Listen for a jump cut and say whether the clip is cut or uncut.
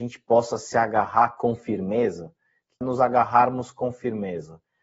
cut